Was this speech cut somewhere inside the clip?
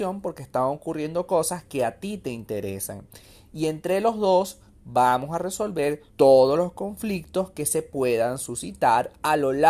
yes; 1 cut; at 6.1 s

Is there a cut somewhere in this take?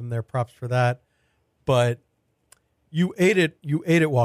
no; 0 cuts

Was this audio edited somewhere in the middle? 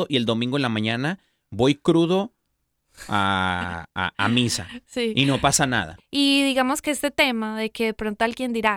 yes; 1 cut; at 6.0 s

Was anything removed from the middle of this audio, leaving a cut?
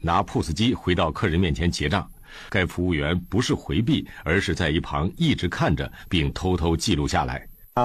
yes; 1 cut; at 2.5 s

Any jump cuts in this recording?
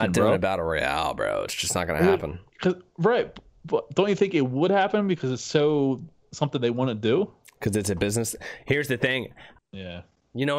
yes; 2 cuts; at 2.5 s, 9.6 s

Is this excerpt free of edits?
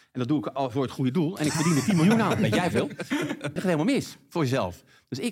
no; 1 cut; at 3.6 s

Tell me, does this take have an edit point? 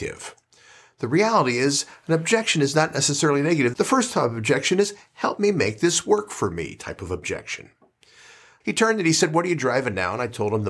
yes; 2 cuts; at 3.7 s, 8.6 s

